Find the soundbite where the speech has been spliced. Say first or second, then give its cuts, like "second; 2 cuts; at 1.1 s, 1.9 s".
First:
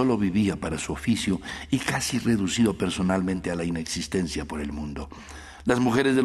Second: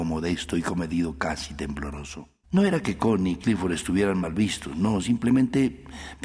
second; 1 cut; at 2.4 s